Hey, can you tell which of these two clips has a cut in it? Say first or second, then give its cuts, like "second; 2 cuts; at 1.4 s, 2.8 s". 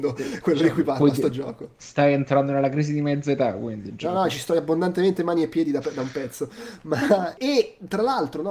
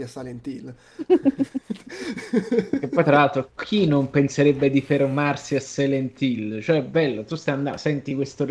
first; 1 cut; at 7.4 s